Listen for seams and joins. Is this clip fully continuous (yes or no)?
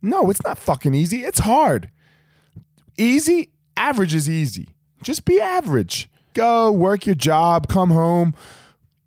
no